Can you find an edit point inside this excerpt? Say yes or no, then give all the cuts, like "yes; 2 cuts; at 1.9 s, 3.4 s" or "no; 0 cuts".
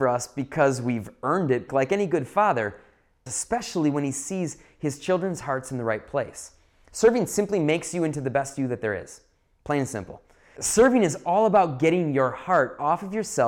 yes; 3 cuts; at 1.7 s, 3.3 s, 10.6 s